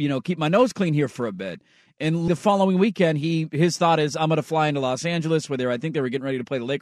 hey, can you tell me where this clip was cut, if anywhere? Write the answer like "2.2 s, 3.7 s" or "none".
2.3 s